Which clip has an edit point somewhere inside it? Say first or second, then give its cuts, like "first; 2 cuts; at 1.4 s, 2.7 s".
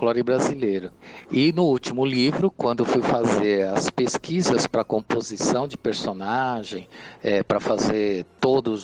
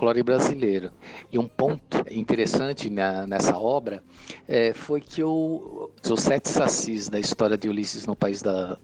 second; 2 cuts; at 1.2 s, 6.0 s